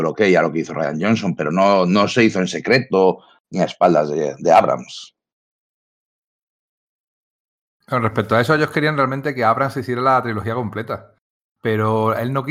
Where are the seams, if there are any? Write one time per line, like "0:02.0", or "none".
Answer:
none